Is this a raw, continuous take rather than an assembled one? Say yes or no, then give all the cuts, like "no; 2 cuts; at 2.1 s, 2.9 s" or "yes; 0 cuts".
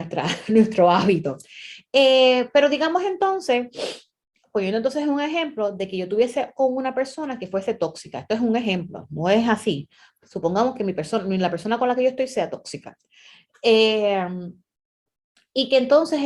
yes; 0 cuts